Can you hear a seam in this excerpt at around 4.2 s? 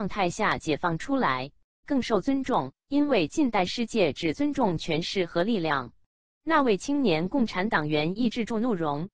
no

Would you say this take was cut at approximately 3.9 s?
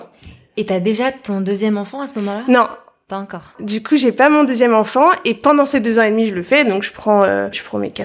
no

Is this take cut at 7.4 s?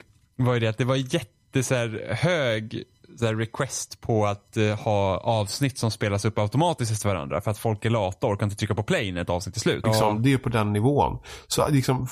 no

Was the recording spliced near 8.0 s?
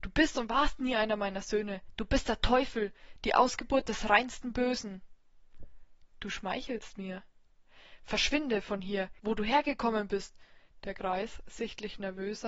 no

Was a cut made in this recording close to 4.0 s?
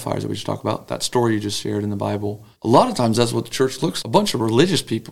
yes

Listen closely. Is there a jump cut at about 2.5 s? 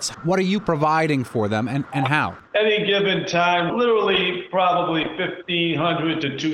yes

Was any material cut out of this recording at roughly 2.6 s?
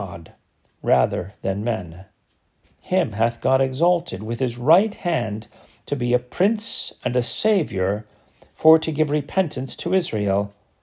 yes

